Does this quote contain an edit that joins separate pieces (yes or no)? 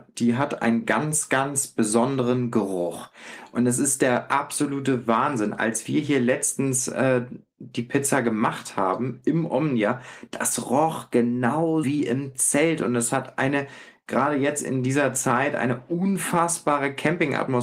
yes